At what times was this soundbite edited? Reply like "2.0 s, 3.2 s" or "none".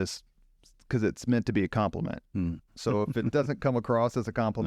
2.7 s

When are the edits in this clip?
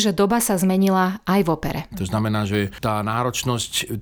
1.9 s

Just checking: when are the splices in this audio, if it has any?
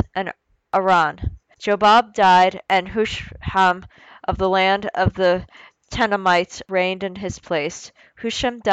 1.5 s

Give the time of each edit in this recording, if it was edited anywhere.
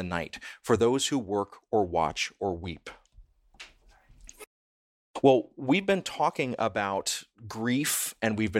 none

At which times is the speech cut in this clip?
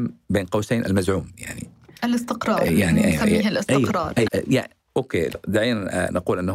4.3 s

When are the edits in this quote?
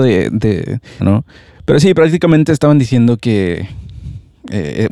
1.0 s

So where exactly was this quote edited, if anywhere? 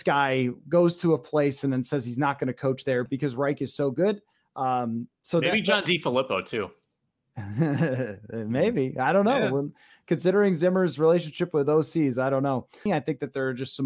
3.1 s, 12.9 s

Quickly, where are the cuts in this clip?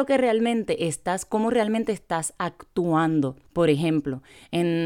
3.5 s

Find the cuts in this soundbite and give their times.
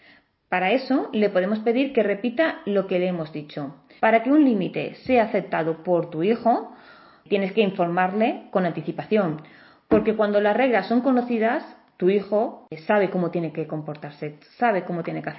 4.0 s

